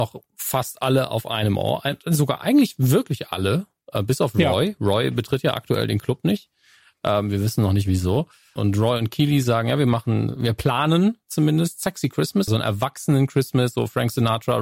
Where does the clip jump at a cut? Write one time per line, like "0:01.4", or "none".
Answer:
0:08.6
0:12.5